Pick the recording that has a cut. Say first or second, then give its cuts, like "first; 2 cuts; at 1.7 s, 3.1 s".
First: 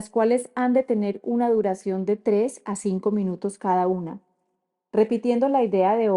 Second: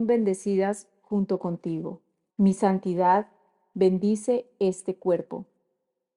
second; 1 cut; at 2.3 s